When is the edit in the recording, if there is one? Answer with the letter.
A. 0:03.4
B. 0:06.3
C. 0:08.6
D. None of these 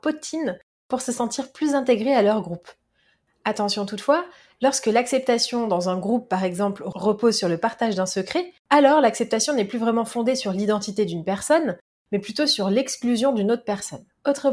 C